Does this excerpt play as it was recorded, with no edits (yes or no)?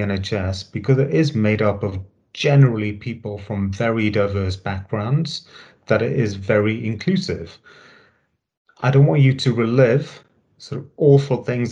yes